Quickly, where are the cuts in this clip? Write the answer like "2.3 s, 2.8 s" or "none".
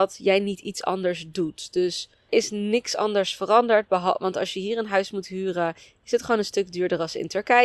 2.3 s